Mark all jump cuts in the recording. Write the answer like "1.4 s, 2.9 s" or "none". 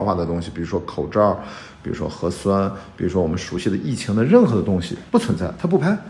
5.1 s